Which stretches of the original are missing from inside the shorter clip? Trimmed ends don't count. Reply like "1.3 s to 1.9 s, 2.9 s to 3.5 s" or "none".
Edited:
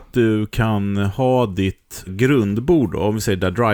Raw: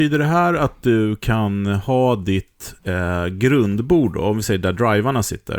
2.8 s to 3.3 s